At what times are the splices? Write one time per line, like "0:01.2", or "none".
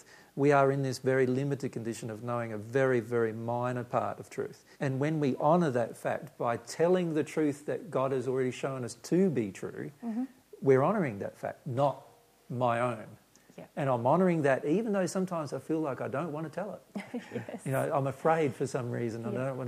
0:04.7
0:11.6